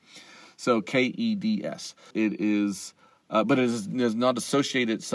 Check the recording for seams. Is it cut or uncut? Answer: cut